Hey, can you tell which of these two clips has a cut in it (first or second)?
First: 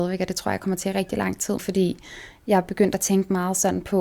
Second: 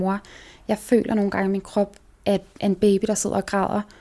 first